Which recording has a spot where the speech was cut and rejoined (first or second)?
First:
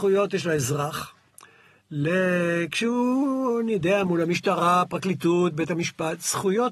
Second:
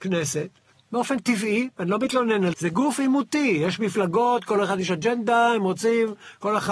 second